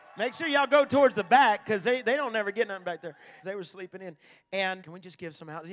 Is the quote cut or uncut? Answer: cut